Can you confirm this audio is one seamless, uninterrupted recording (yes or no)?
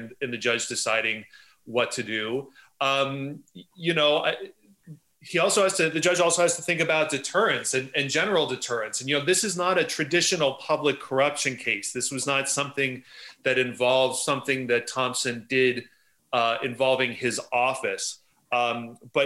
yes